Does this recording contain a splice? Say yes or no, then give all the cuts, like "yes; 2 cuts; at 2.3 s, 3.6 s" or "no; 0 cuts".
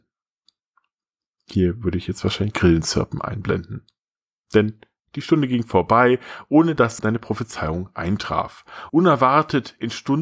yes; 1 cut; at 8.9 s